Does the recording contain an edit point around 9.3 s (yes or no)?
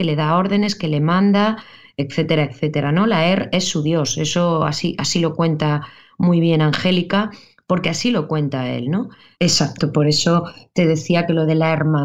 yes